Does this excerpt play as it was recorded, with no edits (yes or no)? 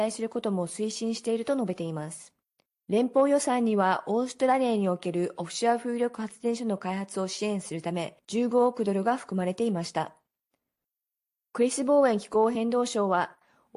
no